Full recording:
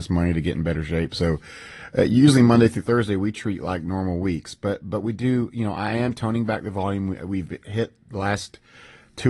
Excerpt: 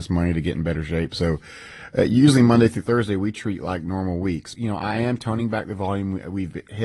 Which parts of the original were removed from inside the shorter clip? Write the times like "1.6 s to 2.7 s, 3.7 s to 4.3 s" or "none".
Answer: 4.5 s to 5.5 s